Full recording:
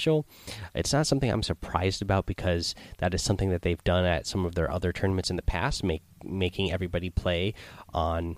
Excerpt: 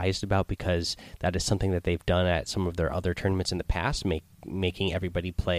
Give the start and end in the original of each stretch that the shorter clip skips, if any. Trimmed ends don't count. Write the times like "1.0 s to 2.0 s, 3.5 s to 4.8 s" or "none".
none